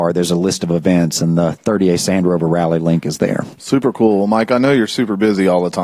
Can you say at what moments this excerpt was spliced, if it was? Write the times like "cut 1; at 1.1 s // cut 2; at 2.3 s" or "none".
none